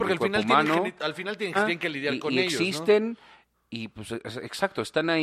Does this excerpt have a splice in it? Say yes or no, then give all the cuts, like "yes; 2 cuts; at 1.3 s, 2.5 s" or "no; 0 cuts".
yes; 1 cut; at 1.5 s